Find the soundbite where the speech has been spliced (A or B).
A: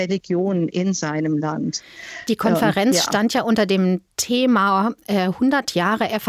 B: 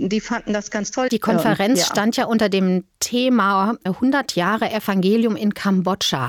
B